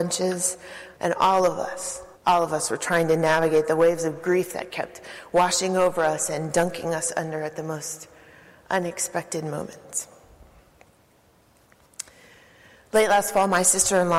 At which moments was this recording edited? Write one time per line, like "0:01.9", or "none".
0:01.0
0:02.1